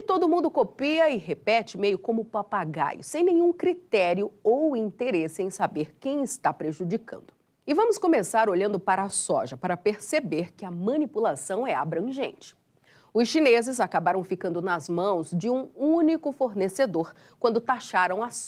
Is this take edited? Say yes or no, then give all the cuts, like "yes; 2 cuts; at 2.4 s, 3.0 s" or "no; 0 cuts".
yes; 1 cut; at 7.6 s